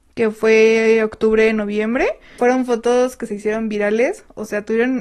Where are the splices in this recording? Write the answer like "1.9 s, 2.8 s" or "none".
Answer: 2.4 s